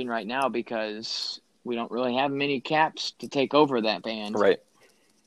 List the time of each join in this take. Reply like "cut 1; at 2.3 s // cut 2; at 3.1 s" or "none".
cut 1; at 3.1 s

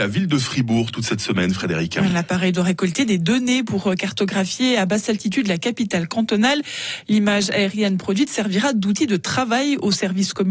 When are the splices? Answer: none

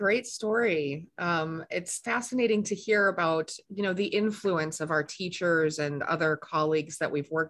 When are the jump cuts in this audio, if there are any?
cut 1; at 2.0 s

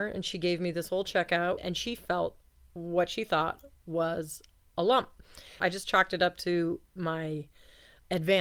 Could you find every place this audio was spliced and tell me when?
cut 1; at 1.6 s // cut 2; at 5.6 s // cut 3; at 6.9 s

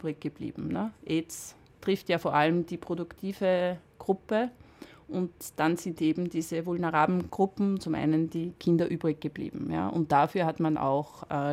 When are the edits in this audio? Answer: cut 1; at 7.8 s

